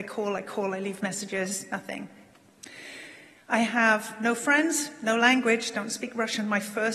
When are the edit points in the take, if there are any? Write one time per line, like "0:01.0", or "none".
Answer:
0:03.4